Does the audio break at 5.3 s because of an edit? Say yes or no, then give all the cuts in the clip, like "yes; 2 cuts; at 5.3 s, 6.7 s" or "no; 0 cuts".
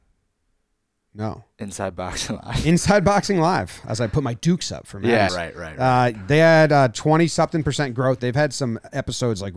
yes; 2 cuts; at 5.3 s, 8.2 s